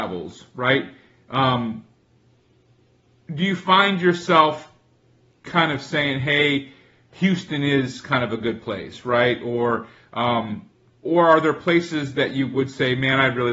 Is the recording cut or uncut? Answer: uncut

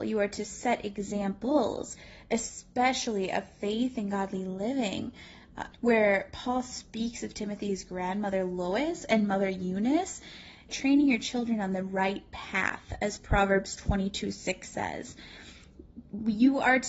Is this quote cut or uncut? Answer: cut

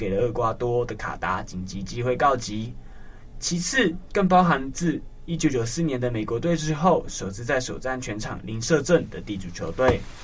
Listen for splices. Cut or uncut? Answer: uncut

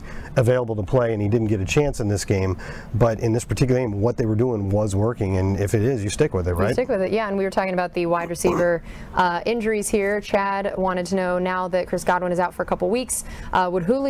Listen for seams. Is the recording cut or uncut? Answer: uncut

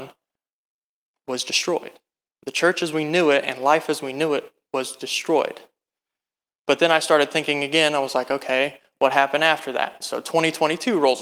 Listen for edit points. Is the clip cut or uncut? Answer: uncut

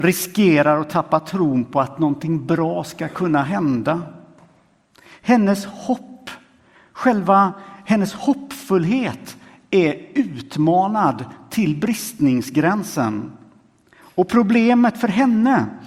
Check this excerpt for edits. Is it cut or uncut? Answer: uncut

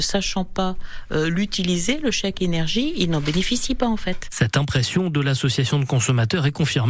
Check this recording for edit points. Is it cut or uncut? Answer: uncut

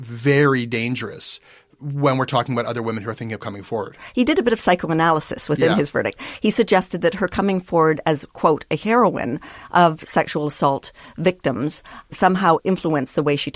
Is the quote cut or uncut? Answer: uncut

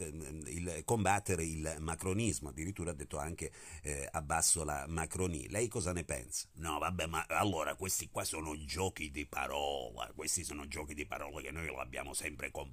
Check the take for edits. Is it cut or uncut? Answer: cut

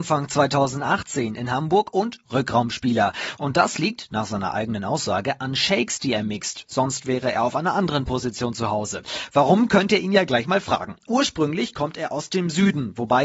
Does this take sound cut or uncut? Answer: uncut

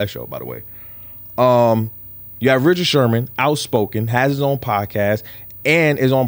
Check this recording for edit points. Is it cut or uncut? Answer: uncut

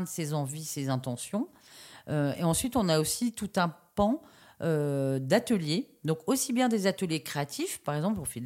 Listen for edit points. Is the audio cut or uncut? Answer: uncut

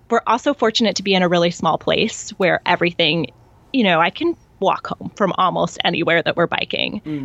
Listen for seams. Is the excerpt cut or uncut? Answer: uncut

